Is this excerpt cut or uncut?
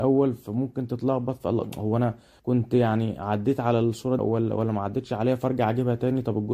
cut